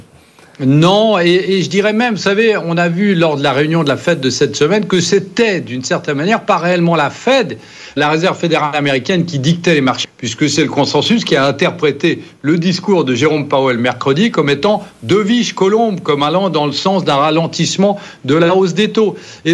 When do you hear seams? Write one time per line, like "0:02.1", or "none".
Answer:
0:08.0
0:10.0